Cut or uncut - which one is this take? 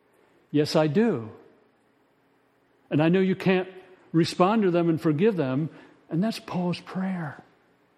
cut